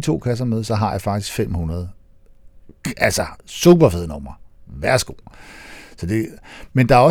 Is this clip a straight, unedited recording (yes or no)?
yes